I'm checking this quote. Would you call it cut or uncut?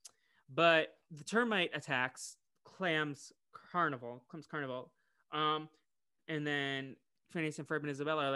cut